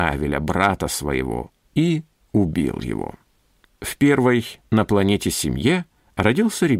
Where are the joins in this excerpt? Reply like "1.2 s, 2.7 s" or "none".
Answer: 3.6 s